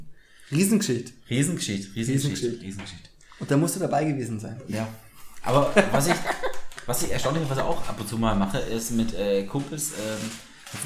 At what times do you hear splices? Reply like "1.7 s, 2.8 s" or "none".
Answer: none